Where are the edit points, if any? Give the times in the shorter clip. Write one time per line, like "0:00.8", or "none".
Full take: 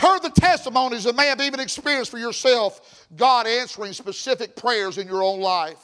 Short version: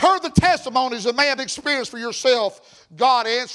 0:01.4